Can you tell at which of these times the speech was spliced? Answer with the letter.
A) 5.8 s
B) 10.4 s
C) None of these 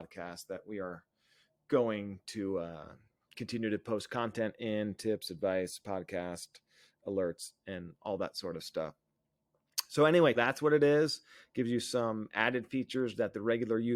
B